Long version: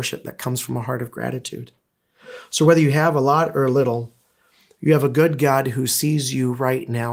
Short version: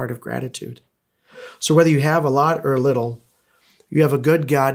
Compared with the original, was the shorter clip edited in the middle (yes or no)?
no